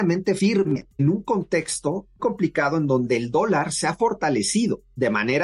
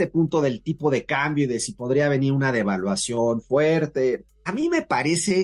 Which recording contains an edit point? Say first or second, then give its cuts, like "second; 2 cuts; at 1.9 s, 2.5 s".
first; 1 cut; at 2.2 s